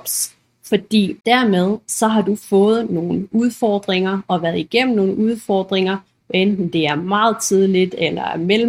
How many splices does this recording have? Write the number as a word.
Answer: one